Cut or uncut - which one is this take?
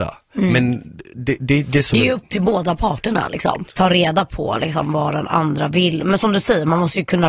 cut